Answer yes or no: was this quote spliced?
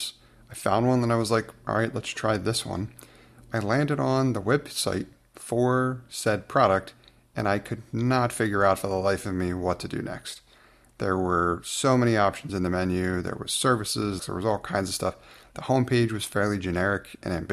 yes